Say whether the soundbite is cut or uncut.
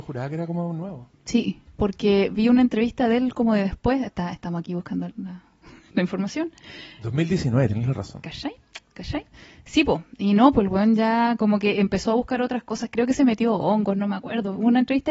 cut